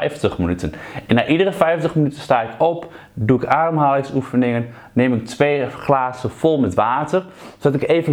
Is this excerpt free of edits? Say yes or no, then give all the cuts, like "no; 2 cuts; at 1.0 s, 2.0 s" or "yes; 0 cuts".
yes; 0 cuts